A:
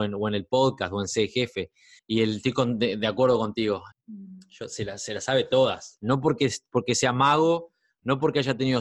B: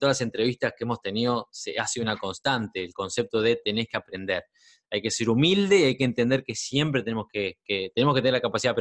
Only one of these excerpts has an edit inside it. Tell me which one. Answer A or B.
A